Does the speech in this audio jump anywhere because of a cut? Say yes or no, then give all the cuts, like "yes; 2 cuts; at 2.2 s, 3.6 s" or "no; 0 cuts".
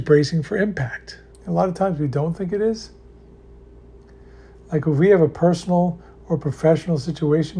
yes; 1 cut; at 1.3 s